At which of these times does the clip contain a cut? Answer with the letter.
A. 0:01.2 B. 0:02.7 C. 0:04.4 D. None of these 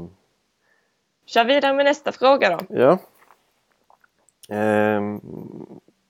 A